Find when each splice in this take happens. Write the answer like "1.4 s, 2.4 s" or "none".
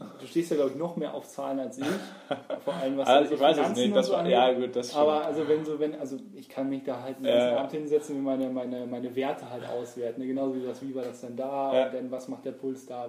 none